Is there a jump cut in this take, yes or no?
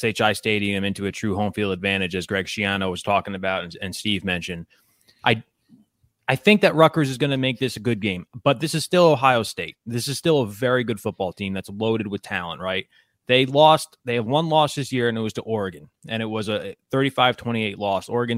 no